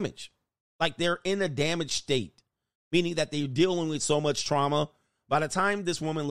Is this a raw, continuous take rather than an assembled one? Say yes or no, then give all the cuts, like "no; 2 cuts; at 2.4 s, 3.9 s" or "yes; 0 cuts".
yes; 0 cuts